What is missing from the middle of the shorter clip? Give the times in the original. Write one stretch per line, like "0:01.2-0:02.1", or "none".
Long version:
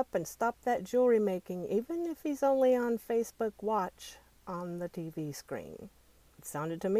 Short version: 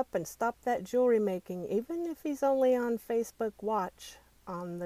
none